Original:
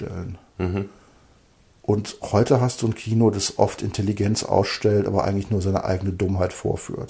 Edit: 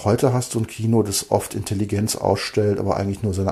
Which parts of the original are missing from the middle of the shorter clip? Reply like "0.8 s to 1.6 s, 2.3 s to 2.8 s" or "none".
none